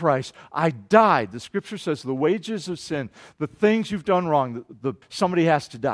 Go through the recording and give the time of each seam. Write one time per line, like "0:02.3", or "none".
0:05.0